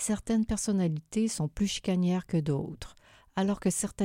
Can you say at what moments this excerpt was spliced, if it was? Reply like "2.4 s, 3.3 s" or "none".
none

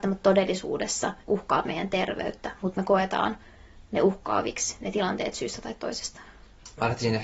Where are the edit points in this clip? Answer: 1.2 s

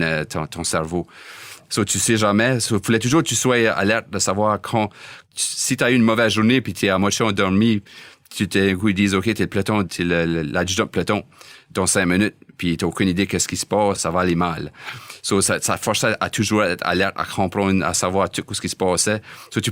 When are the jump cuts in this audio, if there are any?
1.7 s

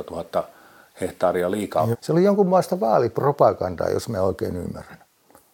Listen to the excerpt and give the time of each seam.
1.9 s

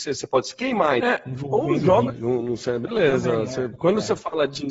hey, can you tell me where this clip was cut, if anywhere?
1.0 s, 2.1 s

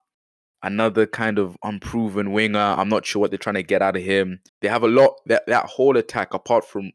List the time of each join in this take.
4.5 s

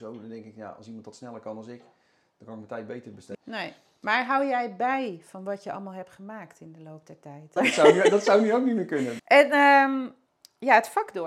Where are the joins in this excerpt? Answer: 3.3 s, 7.6 s, 9.2 s

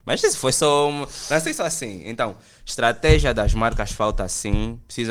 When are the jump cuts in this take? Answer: none

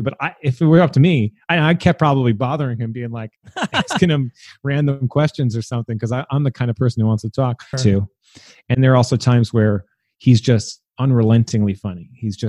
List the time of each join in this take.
7.7 s, 8.7 s

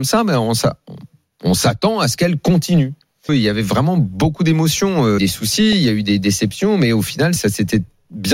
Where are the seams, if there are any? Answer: 3.3 s, 5.2 s, 7.4 s

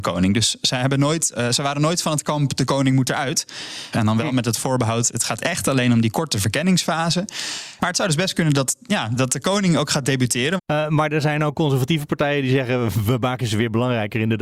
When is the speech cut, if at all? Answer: 3.9 s, 9.2 s, 10.6 s

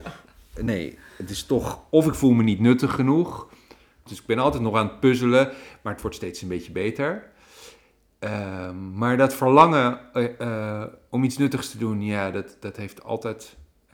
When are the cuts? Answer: 4.1 s

